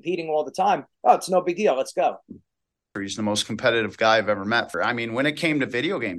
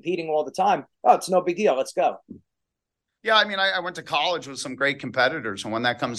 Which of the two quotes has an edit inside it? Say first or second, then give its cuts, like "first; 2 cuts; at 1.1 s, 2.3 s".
first; 2 cuts; at 3.0 s, 4.7 s